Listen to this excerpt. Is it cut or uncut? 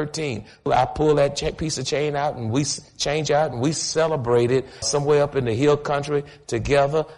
cut